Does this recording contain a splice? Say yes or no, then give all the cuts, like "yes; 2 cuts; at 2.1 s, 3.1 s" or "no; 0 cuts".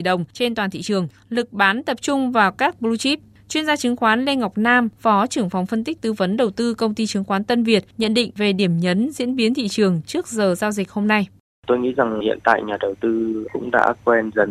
no; 0 cuts